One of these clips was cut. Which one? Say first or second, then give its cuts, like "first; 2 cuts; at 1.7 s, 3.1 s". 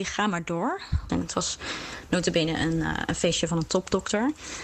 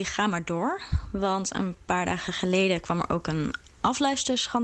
first; 1 cut; at 1.1 s